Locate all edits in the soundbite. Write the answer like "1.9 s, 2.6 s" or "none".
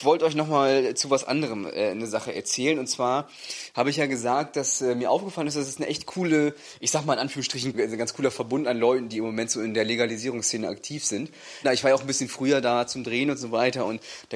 7.7 s, 11.6 s